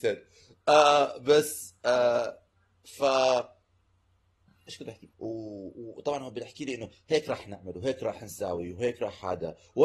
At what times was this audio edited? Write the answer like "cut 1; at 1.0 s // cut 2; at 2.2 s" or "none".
cut 1; at 5.1 s